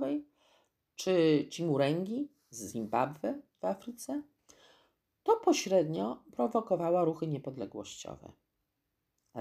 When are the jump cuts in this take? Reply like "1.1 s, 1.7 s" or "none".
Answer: none